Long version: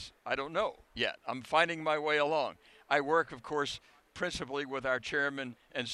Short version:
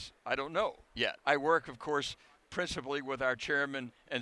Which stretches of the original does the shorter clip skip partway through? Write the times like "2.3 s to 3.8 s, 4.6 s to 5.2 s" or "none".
1.2 s to 2.8 s